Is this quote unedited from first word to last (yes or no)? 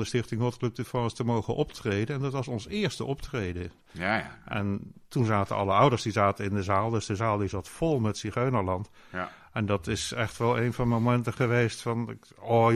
yes